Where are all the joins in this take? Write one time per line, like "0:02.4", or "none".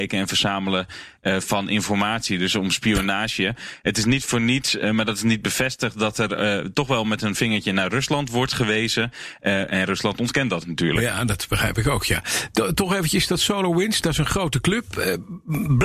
none